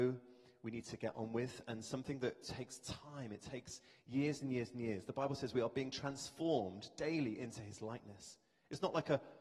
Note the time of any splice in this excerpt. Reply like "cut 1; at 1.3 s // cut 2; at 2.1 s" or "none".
none